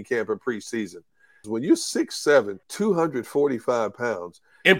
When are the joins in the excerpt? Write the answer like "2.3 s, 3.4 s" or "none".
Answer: 1.4 s, 2.6 s